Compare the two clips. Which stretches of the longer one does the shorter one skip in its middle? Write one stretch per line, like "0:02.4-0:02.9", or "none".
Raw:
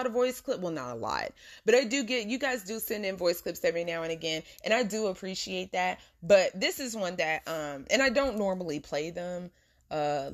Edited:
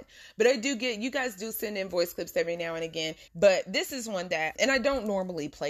0:04.6-0:06.1
0:07.4-0:07.9